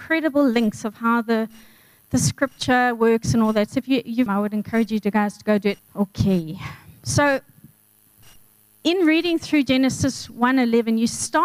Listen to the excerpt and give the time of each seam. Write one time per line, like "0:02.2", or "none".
0:04.3
0:05.8